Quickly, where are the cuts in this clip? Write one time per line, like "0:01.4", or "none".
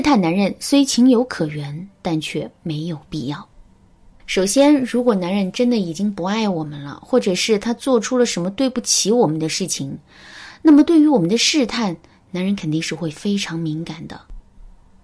none